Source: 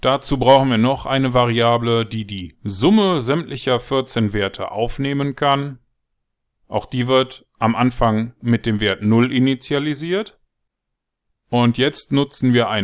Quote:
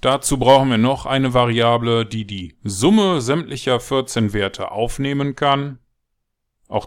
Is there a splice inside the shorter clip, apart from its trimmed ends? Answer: no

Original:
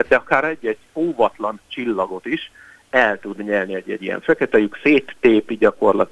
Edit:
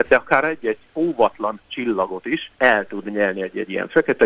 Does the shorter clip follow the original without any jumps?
no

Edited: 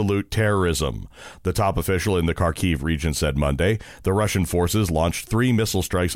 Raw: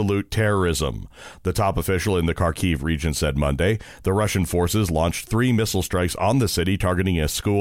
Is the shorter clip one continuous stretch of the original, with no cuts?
yes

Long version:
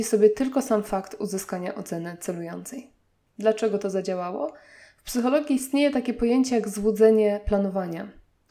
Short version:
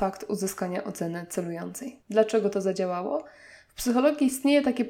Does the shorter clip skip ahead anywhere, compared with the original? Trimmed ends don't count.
yes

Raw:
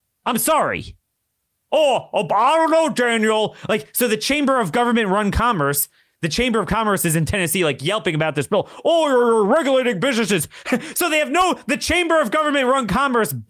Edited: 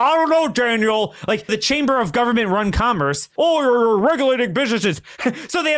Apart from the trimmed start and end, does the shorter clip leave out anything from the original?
yes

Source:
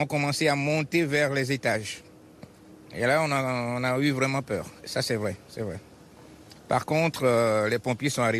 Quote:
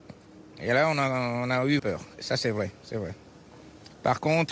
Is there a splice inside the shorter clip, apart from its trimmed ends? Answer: yes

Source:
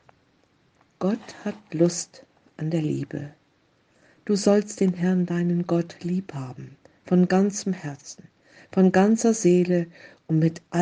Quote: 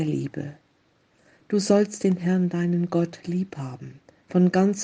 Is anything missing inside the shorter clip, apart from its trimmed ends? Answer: no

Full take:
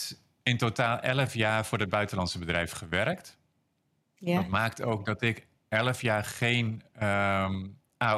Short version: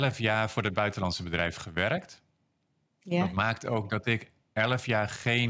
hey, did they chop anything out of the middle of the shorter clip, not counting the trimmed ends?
no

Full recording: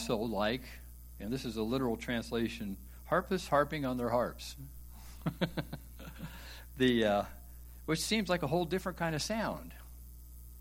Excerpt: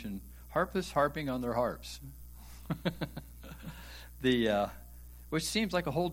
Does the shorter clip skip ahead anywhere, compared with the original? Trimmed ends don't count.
no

